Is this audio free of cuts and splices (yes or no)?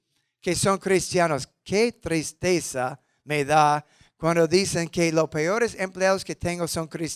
yes